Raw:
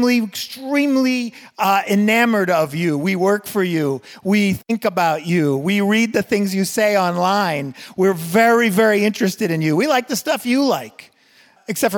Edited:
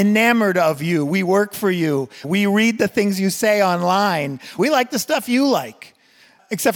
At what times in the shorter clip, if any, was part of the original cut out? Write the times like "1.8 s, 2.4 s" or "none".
2.2 s, 4.6 s